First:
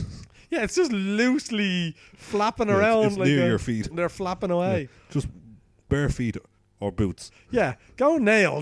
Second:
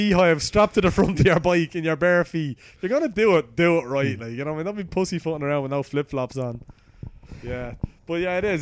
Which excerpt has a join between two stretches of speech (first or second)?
first